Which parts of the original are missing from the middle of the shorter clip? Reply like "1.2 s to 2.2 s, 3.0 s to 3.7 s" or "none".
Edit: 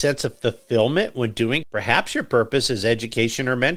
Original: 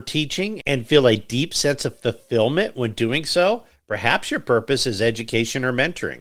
3.2 s to 3.8 s